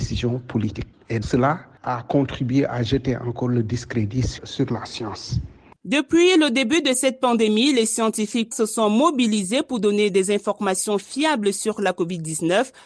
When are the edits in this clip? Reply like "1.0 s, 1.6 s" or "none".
1.2 s, 5.8 s, 8.5 s